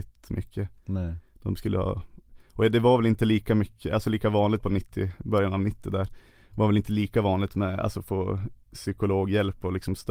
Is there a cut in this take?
yes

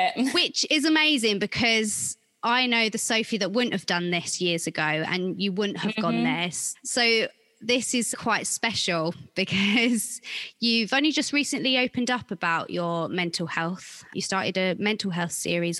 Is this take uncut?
no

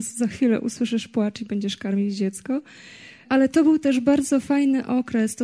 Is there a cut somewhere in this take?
yes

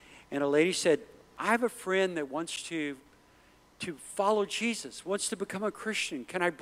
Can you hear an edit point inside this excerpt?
no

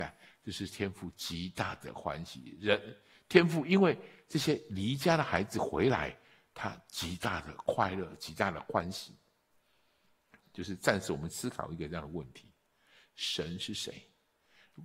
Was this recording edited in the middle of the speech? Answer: yes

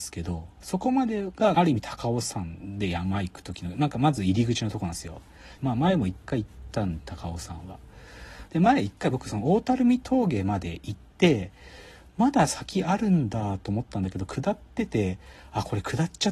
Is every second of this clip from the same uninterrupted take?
no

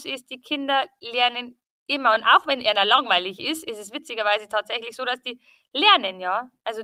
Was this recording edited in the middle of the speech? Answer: no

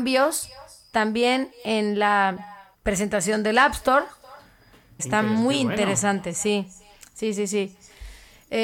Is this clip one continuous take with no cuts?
no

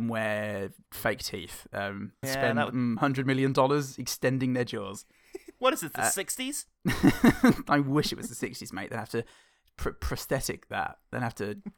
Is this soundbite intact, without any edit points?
no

